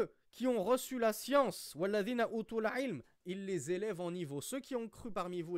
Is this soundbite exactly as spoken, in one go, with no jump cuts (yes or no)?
no